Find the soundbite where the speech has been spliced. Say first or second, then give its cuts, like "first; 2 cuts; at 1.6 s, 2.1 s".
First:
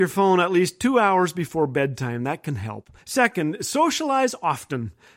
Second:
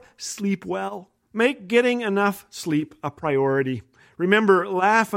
first; 1 cut; at 3.0 s